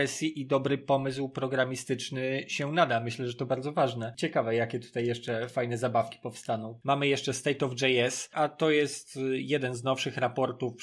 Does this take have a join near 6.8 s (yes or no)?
yes